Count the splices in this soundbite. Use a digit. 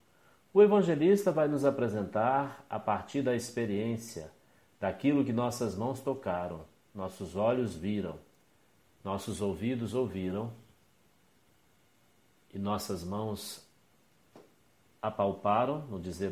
0